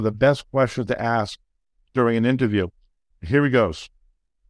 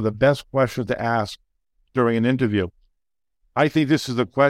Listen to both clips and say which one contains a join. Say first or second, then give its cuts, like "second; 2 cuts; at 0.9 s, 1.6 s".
first; 1 cut; at 3.1 s